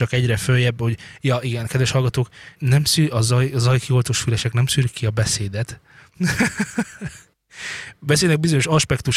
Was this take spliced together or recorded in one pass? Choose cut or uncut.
cut